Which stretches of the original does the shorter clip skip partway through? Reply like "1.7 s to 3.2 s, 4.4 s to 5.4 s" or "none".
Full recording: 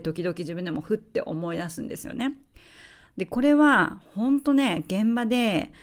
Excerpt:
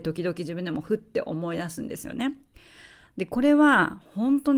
none